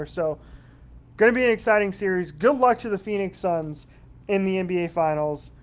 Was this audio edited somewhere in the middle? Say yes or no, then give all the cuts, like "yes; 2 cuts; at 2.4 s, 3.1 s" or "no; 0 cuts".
no; 0 cuts